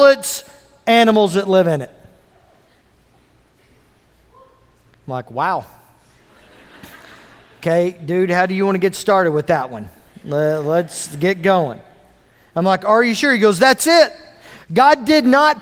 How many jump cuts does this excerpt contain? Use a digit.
1